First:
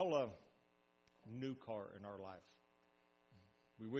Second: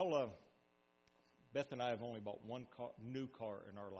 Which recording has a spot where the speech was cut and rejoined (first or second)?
first